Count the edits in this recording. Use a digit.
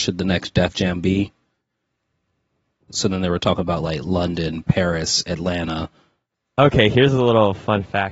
1